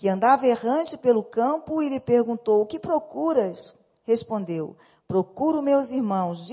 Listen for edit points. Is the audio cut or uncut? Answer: uncut